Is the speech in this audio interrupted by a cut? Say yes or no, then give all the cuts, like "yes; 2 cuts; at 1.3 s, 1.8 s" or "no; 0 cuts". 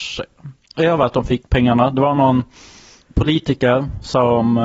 no; 0 cuts